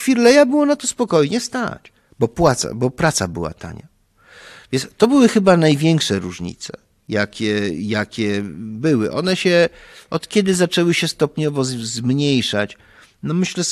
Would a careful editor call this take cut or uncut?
uncut